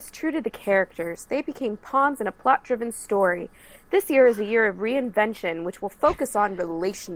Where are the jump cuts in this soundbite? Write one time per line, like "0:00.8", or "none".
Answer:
none